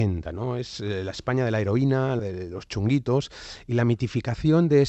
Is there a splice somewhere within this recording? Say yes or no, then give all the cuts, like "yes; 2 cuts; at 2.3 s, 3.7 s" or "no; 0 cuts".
yes; 1 cut; at 2.2 s